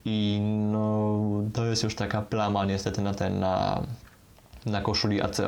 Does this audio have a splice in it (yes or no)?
no